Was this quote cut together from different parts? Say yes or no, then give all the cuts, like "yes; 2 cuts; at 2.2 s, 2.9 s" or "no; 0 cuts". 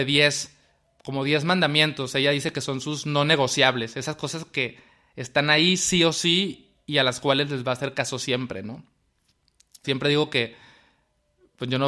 yes; 1 cut; at 9.8 s